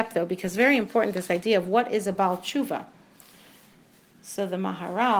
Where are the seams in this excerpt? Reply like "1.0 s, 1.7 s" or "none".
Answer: none

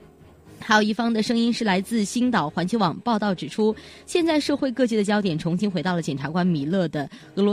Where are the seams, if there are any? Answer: none

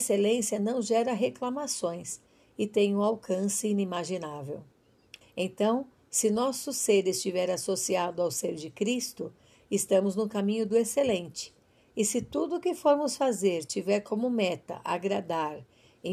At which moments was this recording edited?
5.2 s

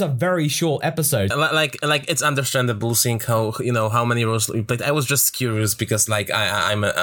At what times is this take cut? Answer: 1.3 s

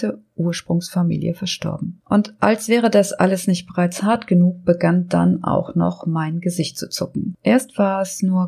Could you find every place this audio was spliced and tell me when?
none

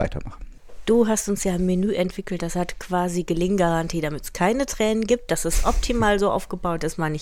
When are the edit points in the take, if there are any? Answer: none

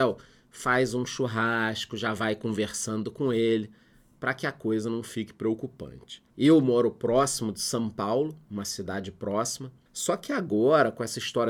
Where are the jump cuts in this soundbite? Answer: 6.3 s, 9.9 s

